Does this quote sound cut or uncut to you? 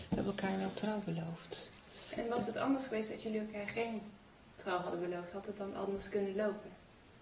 uncut